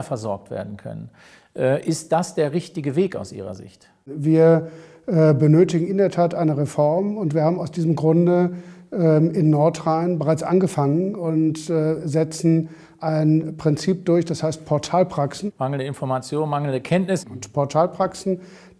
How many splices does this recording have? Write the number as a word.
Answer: two